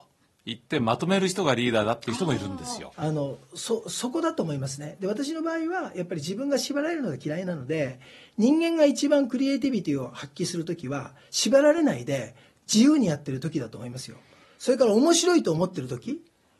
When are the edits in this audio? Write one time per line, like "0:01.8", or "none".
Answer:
0:02.9